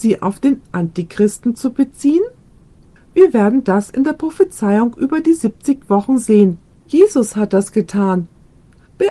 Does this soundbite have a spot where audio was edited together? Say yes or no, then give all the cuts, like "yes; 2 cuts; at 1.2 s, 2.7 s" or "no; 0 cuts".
yes; 2 cuts; at 3.0 s, 6.7 s